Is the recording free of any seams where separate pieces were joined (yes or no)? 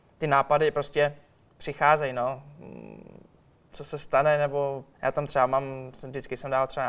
no